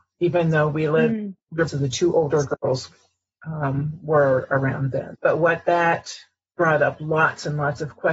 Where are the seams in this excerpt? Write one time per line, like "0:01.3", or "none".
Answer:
0:01.7
0:05.1